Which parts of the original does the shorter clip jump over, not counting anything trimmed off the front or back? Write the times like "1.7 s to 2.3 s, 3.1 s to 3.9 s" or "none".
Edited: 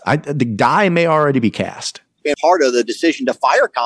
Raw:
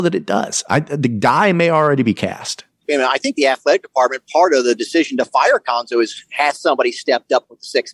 3.0 s to 4.3 s